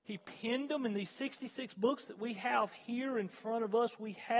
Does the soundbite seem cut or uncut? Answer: uncut